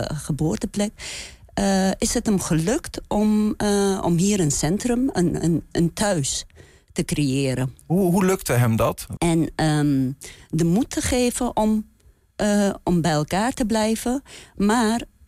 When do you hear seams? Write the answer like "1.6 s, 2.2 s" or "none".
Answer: 9.2 s